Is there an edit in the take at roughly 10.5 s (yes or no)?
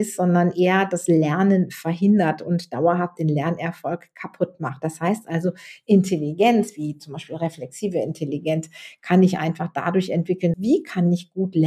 yes